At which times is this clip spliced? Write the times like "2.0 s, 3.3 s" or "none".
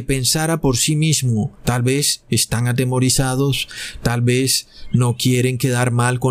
1.6 s